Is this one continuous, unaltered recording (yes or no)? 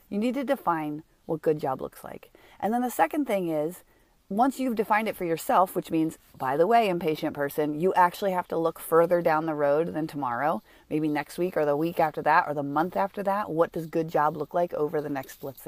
yes